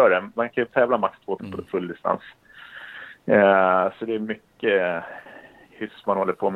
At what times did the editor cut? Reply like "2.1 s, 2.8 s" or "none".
1.4 s